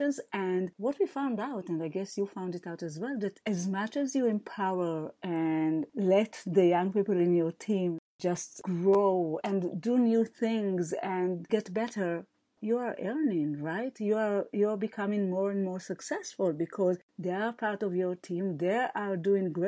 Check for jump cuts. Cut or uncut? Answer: uncut